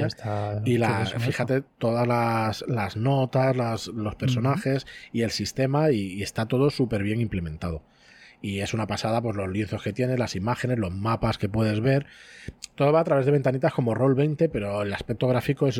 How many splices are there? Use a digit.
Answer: 0